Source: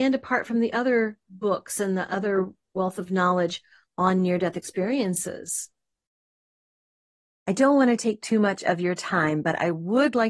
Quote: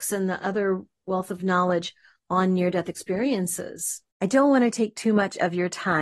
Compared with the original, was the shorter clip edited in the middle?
yes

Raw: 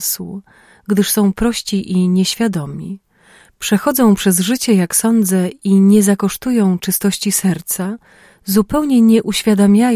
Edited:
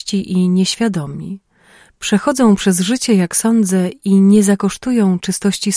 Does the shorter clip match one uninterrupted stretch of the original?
yes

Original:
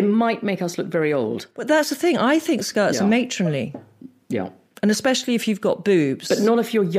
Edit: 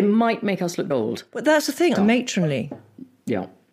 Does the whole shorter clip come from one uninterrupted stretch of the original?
no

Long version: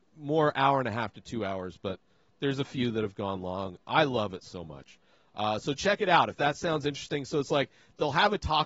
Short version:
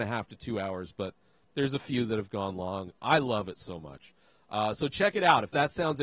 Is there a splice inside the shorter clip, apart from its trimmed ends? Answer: no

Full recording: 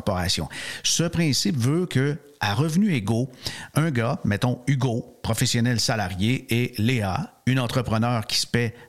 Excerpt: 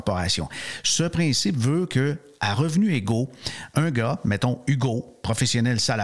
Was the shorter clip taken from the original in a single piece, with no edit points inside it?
yes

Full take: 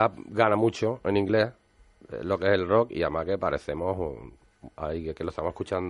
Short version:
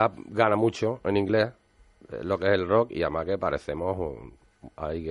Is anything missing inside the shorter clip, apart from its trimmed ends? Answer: no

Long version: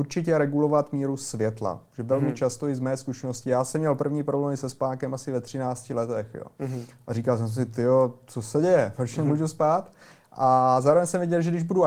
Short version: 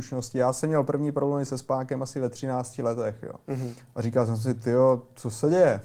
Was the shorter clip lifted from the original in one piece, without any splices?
yes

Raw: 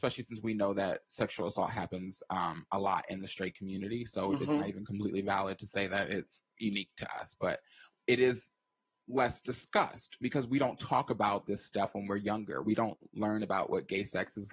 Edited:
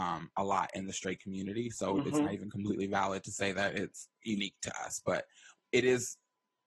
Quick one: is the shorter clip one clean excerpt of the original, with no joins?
yes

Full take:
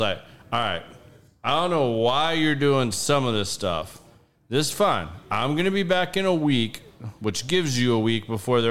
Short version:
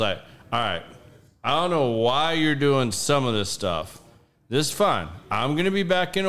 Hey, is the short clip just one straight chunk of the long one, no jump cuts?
yes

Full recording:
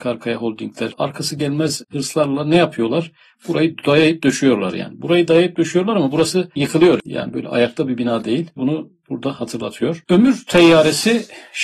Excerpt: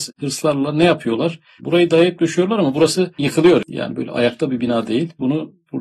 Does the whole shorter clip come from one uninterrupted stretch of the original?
no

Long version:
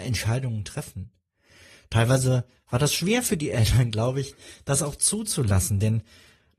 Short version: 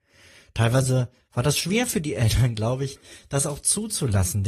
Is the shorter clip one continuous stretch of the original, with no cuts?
yes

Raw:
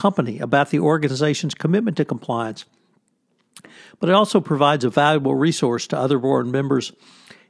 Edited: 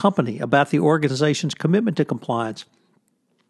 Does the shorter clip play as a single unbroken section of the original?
yes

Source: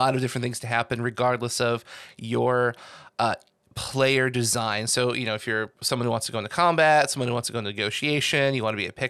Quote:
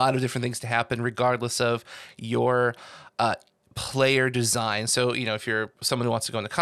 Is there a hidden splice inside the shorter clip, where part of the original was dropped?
no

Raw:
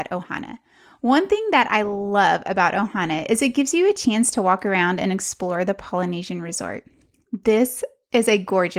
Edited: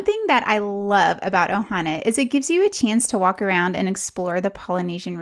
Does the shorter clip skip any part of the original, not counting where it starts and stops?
no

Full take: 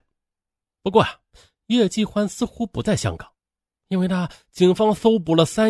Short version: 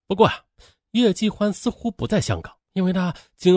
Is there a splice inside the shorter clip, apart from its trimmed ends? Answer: yes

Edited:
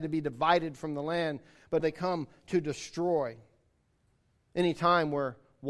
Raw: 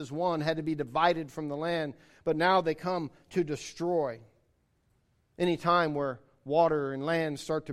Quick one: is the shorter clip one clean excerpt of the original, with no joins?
no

